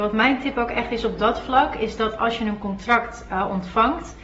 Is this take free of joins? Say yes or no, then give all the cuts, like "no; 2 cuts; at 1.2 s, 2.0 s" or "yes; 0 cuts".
yes; 0 cuts